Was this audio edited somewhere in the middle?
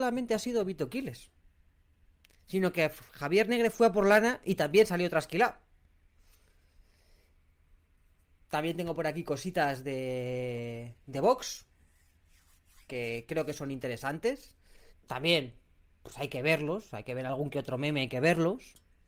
yes; 1 cut; at 14.9 s

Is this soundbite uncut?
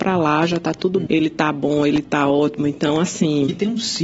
no; 1 cut; at 1.1 s

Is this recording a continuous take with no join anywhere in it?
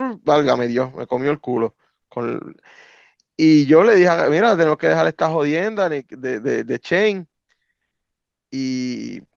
yes; 0 cuts

